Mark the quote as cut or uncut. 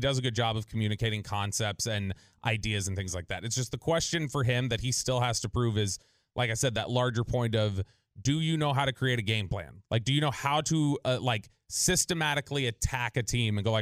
uncut